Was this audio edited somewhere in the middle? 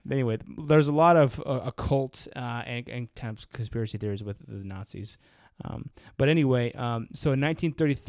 no; 0 cuts

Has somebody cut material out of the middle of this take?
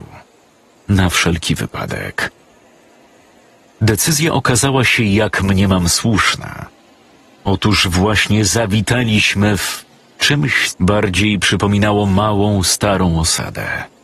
yes; 1 cut; at 10.7 s

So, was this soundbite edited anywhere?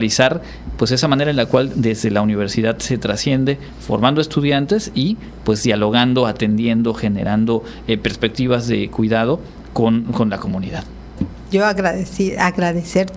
yes; 1 cut; at 11.2 s

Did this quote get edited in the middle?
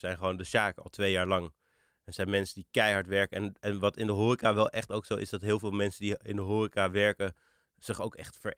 no; 0 cuts

